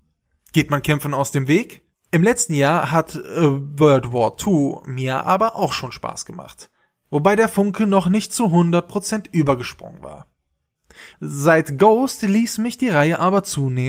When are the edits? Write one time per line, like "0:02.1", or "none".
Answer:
0:01.9
0:11.1